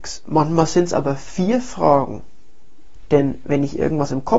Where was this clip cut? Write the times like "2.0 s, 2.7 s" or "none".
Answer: 3.1 s